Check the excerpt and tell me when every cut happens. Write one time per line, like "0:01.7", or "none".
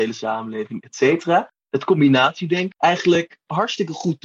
0:02.7